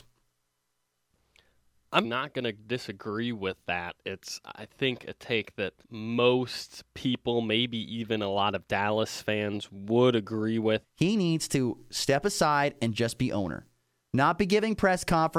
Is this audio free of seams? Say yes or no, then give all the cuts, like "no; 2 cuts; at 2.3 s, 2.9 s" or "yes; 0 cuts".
no; 3 cuts; at 2.0 s, 5.8 s, 10.8 s